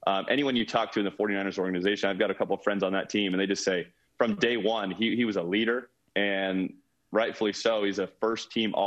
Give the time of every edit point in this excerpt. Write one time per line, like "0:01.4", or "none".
0:06.0